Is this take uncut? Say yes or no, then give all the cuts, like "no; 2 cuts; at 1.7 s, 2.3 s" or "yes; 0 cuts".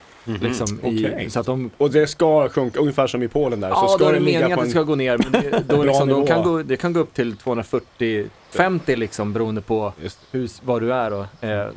no; 1 cut; at 8.5 s